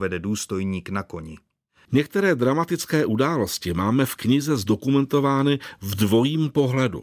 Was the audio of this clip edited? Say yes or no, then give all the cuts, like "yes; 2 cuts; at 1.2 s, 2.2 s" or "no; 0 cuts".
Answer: yes; 1 cut; at 1.9 s